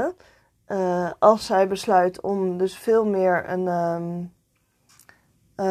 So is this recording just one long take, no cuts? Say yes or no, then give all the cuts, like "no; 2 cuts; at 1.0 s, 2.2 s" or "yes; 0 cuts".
yes; 0 cuts